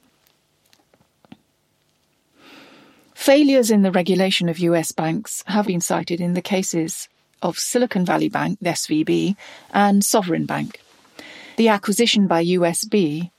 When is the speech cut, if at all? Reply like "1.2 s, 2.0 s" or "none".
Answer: 5.6 s, 11.6 s